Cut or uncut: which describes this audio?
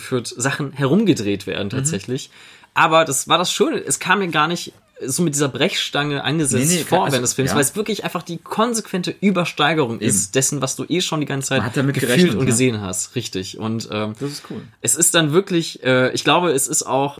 uncut